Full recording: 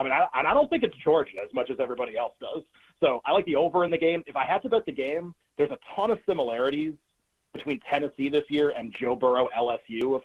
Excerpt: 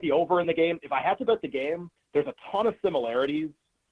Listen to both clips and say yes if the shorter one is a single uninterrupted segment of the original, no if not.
yes